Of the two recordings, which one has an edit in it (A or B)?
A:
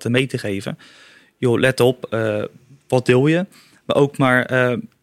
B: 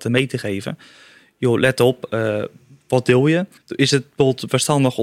B